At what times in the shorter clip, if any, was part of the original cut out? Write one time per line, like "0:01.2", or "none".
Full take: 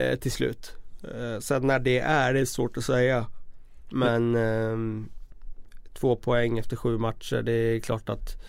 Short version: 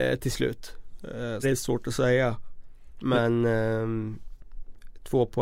0:01.4